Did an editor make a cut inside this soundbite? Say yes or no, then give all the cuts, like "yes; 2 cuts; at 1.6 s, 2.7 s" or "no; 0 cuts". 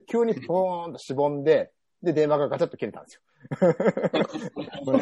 no; 0 cuts